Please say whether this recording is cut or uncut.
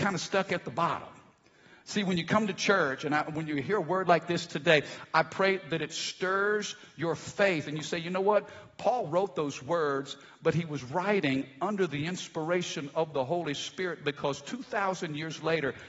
uncut